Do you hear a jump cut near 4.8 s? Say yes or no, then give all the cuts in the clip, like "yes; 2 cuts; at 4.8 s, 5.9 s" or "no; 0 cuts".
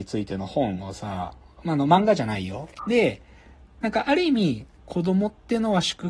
yes; 2 cuts; at 2.8 s, 4.8 s